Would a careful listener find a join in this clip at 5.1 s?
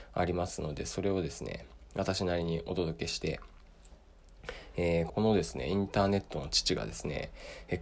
yes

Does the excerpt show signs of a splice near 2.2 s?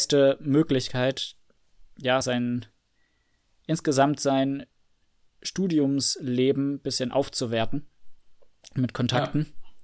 no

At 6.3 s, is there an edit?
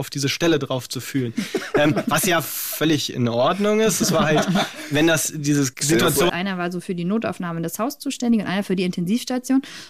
yes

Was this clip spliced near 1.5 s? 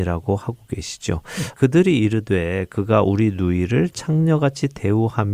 yes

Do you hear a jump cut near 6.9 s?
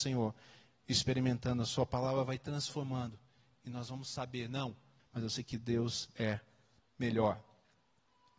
no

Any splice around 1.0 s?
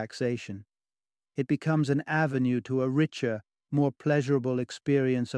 no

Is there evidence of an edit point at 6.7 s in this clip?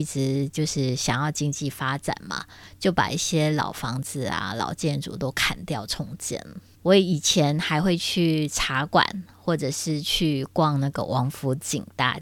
yes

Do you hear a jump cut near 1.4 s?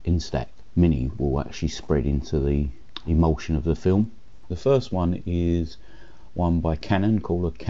no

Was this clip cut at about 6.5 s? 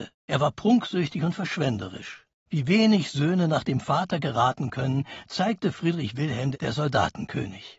yes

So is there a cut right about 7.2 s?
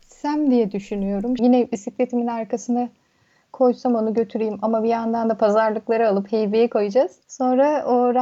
no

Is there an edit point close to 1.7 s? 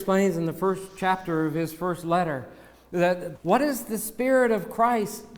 no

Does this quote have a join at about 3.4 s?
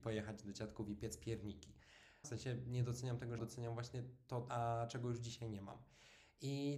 yes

